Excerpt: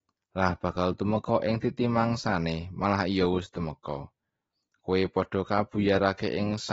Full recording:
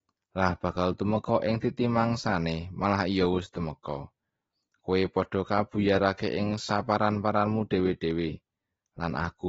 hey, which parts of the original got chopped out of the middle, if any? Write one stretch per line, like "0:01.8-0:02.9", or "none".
none